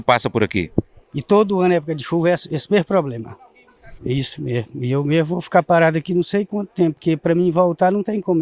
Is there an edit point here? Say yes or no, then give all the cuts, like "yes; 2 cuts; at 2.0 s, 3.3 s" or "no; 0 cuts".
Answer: yes; 2 cuts; at 1.0 s, 4.0 s